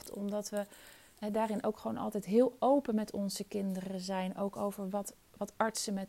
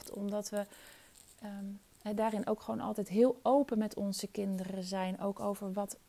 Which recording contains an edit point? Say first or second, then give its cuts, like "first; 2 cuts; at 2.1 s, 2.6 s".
first; 1 cut; at 1.1 s